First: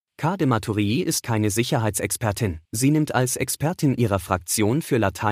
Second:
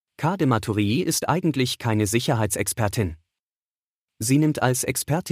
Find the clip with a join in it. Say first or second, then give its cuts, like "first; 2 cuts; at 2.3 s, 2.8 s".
first; 2 cuts; at 1.2 s, 2.7 s